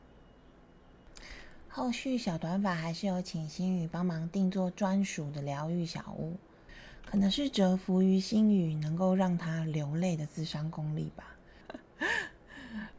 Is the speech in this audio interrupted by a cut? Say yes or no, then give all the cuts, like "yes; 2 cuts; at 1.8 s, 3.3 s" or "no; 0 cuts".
yes; 1 cut; at 11.6 s